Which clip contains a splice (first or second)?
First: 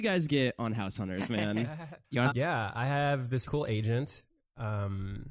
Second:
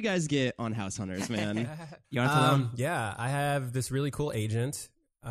first